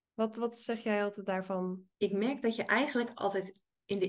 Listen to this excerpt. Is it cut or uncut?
cut